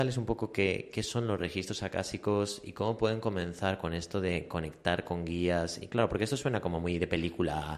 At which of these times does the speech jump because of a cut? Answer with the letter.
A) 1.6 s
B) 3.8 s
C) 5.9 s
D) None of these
C